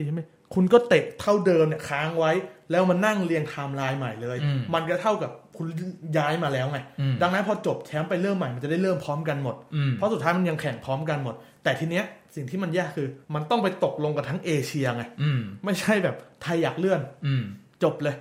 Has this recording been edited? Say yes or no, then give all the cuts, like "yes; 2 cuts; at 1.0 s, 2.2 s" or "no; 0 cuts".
yes; 1 cut; at 13.2 s